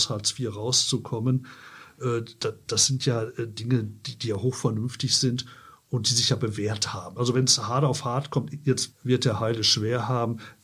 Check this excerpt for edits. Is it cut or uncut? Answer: cut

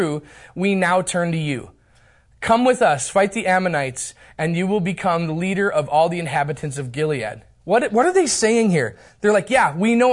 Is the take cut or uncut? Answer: uncut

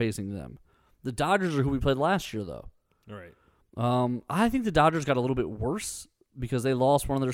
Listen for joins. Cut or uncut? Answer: uncut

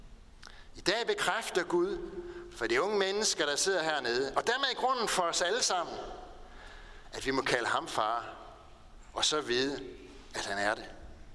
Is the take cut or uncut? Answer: uncut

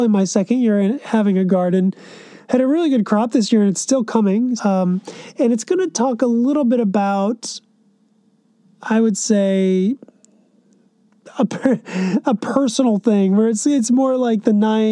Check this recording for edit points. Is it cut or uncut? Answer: cut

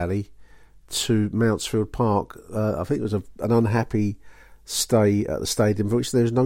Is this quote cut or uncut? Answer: uncut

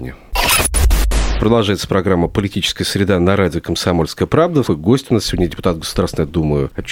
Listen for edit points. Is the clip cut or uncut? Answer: cut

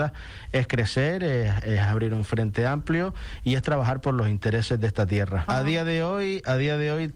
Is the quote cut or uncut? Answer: cut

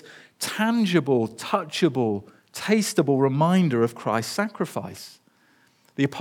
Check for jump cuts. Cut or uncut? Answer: uncut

